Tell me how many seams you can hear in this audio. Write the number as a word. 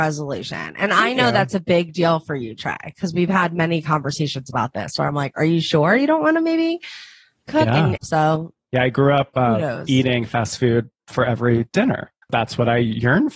two